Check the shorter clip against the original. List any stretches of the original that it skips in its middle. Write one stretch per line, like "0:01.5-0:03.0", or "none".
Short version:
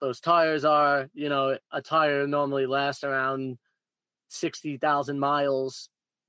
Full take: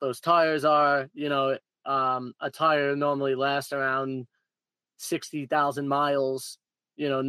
0:01.7-0:02.4